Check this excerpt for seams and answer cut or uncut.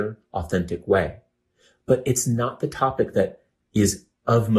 uncut